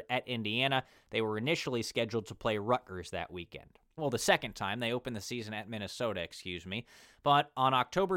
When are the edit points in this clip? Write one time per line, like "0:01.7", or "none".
0:04.0